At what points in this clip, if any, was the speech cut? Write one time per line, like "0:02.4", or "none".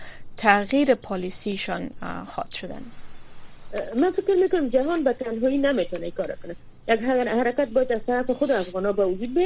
none